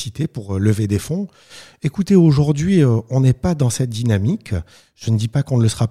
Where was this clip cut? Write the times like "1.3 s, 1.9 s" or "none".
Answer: none